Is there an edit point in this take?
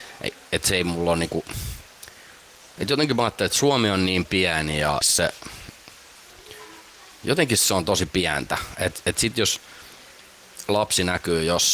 yes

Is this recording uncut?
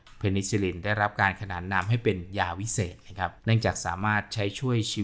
no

